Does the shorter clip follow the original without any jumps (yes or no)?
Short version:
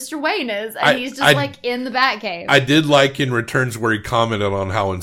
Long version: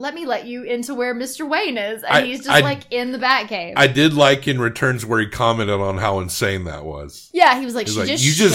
yes